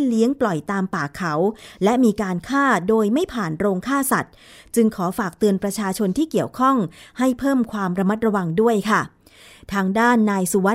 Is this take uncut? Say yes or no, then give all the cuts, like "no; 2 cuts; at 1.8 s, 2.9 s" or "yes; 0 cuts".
yes; 0 cuts